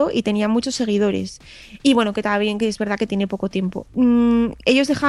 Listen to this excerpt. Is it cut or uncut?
cut